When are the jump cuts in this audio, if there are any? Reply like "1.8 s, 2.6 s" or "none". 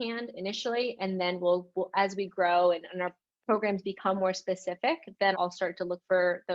5.3 s